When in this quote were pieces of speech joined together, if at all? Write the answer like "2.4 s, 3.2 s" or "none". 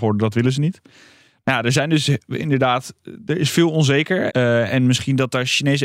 4.3 s